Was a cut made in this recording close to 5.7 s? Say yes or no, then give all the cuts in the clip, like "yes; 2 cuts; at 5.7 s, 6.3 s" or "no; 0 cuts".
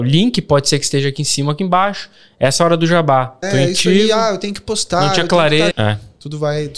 yes; 2 cuts; at 3.4 s, 5.7 s